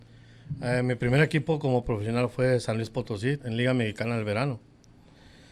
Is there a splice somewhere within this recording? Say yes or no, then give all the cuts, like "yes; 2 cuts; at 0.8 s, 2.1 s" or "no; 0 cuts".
yes; 1 cut; at 3.4 s